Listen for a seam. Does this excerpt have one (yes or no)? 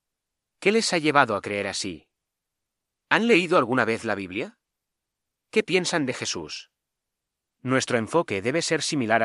yes